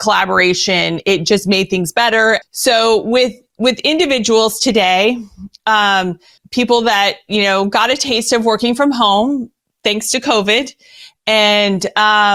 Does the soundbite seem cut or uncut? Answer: cut